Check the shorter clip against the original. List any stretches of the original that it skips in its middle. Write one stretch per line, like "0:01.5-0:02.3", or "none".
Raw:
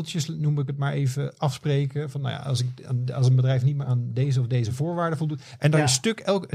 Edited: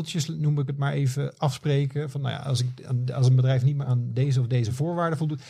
none